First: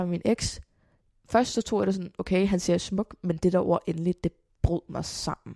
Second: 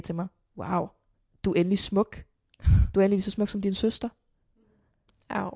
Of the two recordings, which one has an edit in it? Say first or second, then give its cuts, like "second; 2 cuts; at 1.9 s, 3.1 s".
second; 1 cut; at 1.3 s